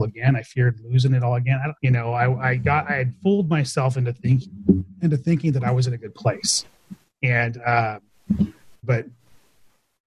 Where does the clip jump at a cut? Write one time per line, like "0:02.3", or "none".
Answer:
0:01.7
0:08.8